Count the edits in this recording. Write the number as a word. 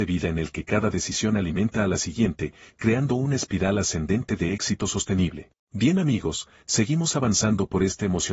one